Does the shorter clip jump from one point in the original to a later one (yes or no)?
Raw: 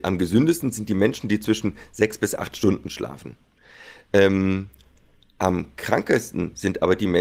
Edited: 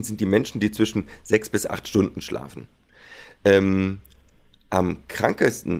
no